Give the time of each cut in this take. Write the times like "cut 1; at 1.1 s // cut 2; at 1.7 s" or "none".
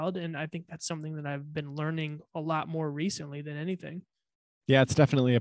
none